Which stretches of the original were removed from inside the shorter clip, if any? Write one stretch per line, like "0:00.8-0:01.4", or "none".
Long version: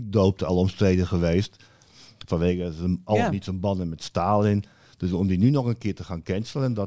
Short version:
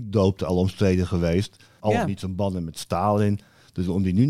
0:01.8-0:03.0